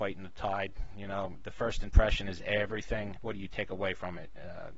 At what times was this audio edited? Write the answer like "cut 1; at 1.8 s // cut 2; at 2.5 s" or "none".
cut 1; at 3.2 s